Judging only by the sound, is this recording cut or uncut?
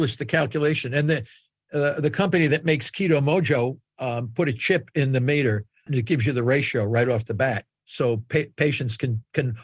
cut